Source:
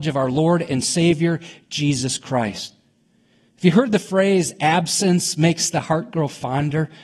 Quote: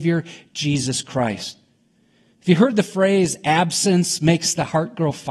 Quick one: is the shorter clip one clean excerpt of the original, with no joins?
yes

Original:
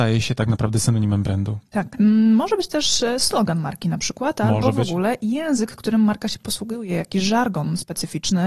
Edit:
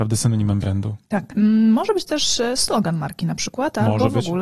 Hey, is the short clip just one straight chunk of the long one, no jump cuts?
yes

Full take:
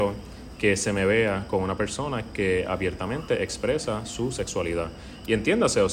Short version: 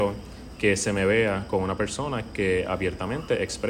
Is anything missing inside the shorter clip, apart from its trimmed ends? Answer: no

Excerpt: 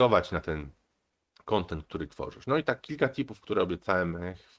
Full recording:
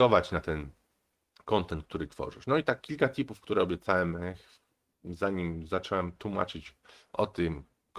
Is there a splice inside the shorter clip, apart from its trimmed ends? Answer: no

